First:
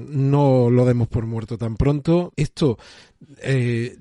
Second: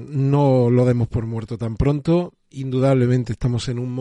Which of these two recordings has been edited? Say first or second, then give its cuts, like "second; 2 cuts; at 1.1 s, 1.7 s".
first; 1 cut; at 2.3 s